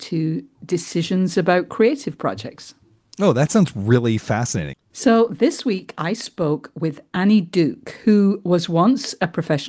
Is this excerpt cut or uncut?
cut